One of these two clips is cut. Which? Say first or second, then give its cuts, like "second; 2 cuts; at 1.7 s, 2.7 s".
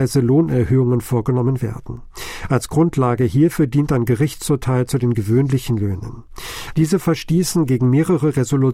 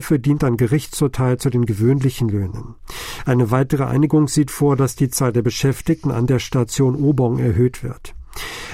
first; 1 cut; at 6.7 s